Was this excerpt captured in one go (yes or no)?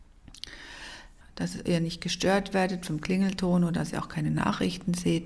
no